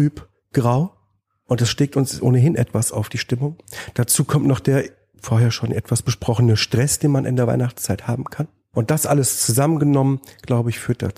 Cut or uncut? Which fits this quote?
uncut